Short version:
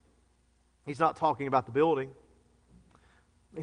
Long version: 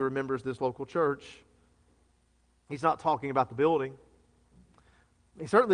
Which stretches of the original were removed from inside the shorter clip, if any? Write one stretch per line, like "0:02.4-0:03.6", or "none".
none